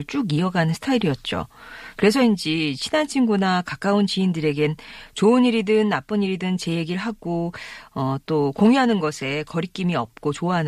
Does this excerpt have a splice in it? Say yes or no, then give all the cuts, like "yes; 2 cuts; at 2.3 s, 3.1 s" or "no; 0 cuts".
yes; 1 cut; at 1.9 s